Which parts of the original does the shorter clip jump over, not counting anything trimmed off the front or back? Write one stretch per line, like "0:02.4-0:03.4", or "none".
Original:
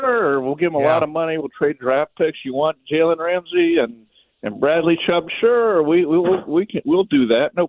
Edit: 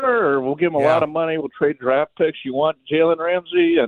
none